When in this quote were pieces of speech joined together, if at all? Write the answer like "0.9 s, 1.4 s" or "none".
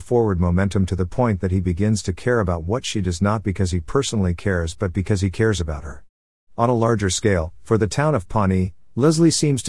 none